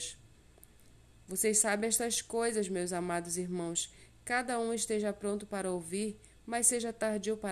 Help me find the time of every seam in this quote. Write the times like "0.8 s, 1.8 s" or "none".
none